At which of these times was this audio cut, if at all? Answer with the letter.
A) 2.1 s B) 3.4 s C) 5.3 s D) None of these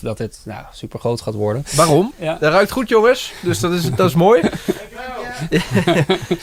A